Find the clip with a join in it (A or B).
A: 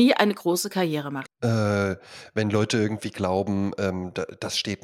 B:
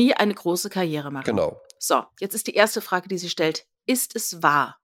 A